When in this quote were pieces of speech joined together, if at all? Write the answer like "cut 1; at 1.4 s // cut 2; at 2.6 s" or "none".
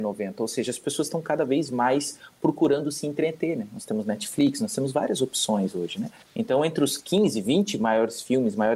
cut 1; at 6.3 s